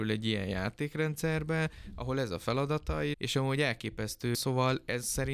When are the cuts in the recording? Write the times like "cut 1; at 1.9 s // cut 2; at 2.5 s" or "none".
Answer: cut 1; at 3.1 s // cut 2; at 4.3 s